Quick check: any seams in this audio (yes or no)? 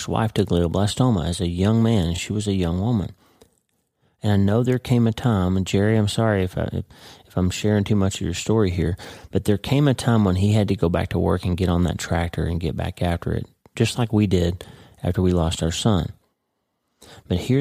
no